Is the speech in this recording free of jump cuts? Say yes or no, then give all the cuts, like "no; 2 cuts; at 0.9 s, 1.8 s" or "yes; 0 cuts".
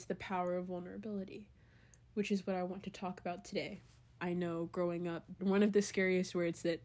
no; 2 cuts; at 4.2 s, 5.4 s